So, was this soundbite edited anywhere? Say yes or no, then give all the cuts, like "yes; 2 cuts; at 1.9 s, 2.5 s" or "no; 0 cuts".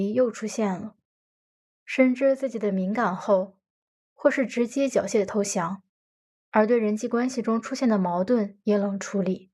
yes; 1 cut; at 3.9 s